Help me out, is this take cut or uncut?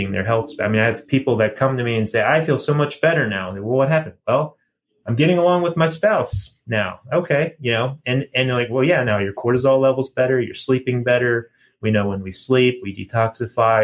uncut